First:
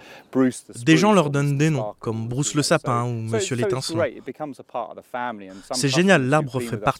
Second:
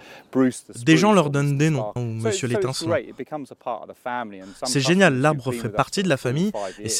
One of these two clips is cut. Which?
second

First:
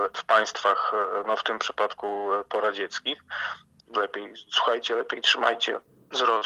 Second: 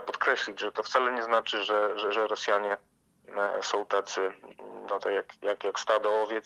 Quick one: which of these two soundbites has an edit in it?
first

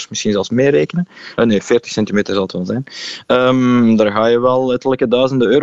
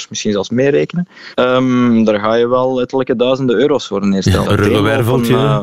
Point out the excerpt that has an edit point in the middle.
second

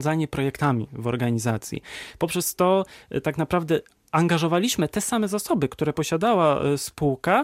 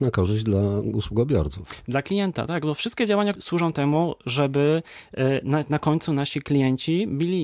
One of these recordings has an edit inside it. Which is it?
second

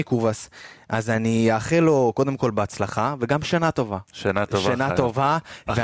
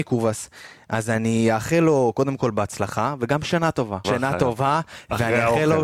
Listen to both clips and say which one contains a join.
second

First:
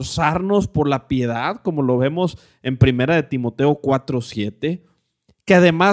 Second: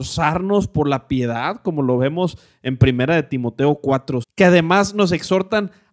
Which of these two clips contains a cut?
second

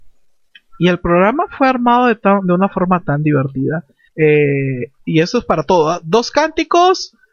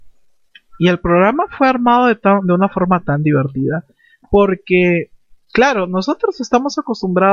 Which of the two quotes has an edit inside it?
first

